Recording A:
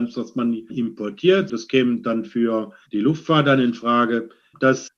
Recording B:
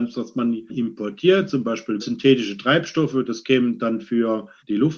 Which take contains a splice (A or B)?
A